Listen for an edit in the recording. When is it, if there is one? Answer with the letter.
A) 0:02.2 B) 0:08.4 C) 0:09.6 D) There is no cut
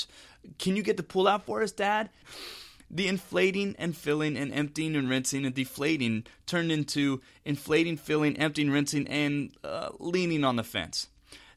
A